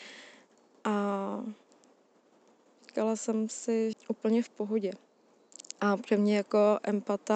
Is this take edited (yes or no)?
yes